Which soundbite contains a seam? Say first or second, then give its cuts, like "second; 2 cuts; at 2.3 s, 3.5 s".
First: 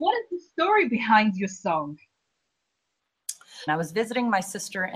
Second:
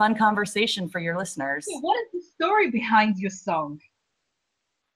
first; 1 cut; at 3.7 s